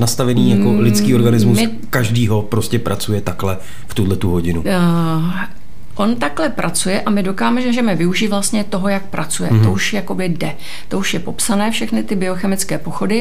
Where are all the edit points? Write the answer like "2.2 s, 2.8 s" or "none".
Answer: none